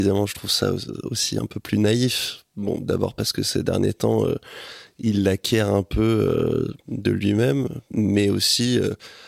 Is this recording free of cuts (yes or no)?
yes